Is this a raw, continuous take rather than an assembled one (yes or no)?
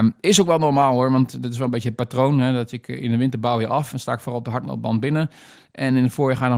yes